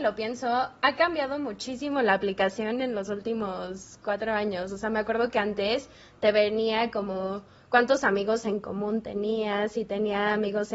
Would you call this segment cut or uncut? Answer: uncut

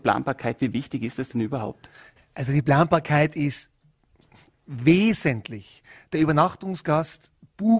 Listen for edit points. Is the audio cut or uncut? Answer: uncut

